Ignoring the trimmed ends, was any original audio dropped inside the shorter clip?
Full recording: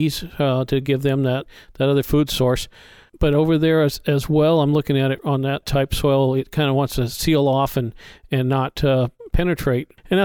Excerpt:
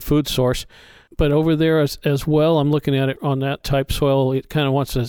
no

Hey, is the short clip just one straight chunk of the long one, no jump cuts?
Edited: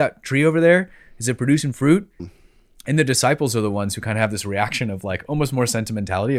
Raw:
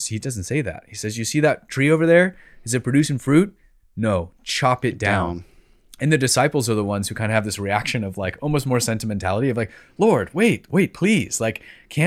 no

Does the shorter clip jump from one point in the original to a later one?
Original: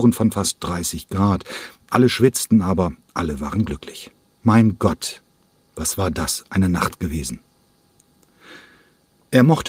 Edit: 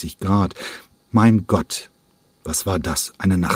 yes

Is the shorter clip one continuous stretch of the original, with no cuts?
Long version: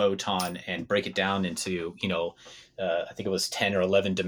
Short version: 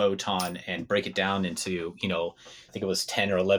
no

